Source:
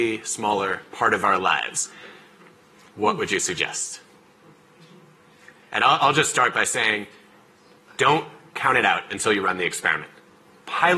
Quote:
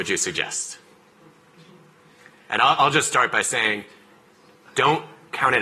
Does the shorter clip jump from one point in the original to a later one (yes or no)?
no